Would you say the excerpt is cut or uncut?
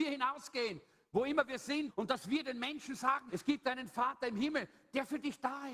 cut